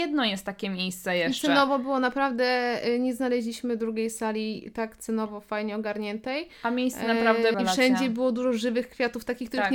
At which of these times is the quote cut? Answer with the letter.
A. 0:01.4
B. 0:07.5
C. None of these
B